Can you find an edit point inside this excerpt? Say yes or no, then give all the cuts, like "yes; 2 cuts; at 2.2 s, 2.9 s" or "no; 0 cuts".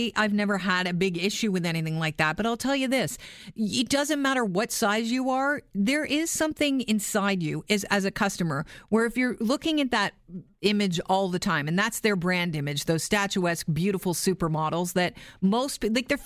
no; 0 cuts